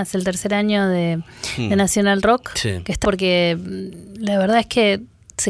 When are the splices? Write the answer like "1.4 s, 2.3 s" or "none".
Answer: 3.0 s